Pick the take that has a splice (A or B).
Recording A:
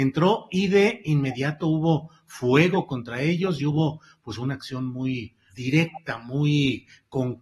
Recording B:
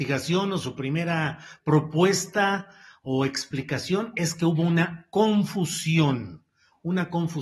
A